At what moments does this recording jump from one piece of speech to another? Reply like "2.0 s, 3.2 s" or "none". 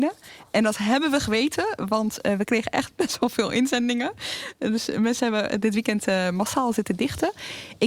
none